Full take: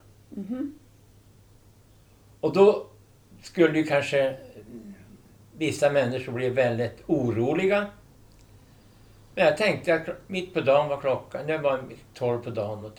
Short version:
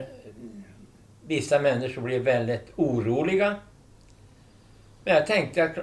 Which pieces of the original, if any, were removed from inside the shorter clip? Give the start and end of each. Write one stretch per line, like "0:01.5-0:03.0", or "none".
none